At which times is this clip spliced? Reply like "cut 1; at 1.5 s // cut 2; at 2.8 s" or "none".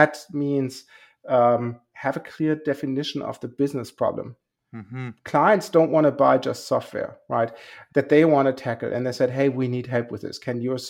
cut 1; at 7.9 s